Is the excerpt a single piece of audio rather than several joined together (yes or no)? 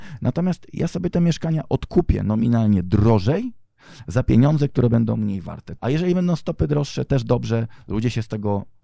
no